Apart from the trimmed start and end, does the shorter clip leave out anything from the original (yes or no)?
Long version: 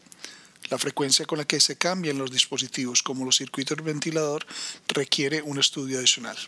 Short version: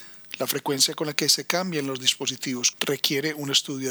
yes